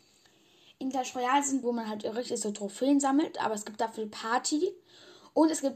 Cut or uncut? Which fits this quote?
cut